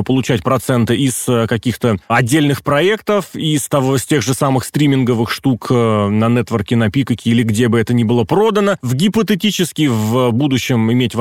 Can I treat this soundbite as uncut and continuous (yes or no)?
yes